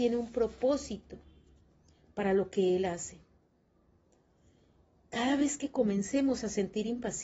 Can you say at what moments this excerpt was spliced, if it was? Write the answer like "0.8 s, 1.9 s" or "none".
none